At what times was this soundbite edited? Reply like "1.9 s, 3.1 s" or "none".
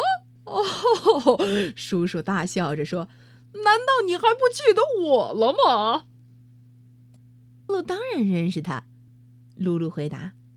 7.7 s, 9.1 s